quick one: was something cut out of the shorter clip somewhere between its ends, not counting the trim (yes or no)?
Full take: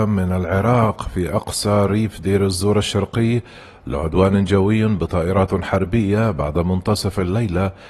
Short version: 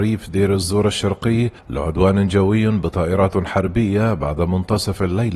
yes